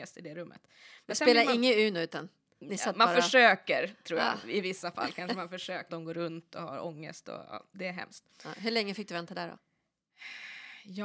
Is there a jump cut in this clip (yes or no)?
yes